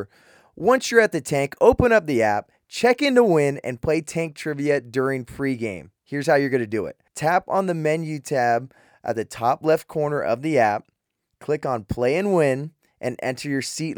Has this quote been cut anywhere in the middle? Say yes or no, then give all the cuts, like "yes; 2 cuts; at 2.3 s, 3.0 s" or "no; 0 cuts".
yes; 1 cut; at 7.1 s